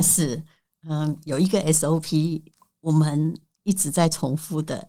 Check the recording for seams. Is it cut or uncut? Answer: uncut